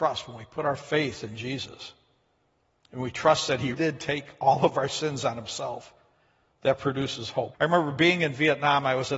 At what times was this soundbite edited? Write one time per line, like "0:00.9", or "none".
0:03.7
0:07.5

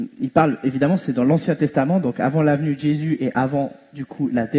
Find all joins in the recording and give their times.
none

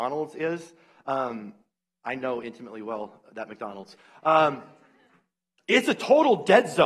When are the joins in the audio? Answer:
none

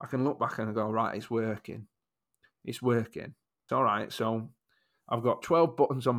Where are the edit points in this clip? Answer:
0:03.7

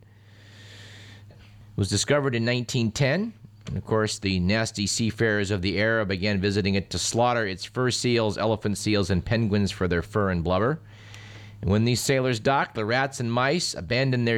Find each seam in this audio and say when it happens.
0:01.3

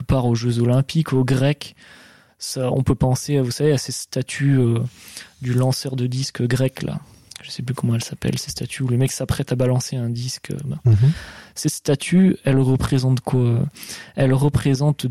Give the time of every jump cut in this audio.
none

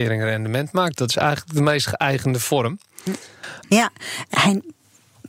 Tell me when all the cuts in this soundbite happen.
0:03.6

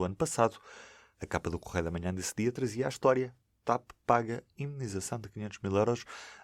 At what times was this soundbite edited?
none

